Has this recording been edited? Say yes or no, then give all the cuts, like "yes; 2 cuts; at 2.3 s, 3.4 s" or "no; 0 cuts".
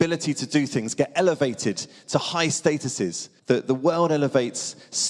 yes; 1 cut; at 3.4 s